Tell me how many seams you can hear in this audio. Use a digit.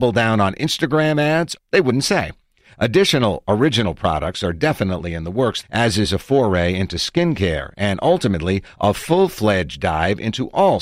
2